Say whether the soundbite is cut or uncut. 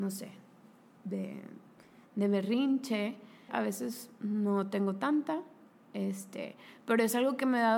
cut